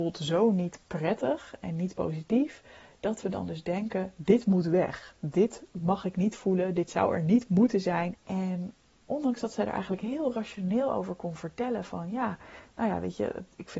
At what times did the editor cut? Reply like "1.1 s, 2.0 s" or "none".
8.1 s